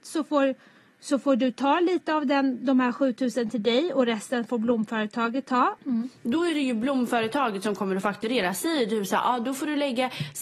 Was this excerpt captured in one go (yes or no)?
no